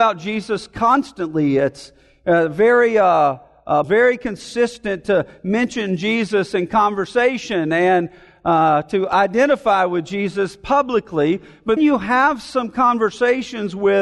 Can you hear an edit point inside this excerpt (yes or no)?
yes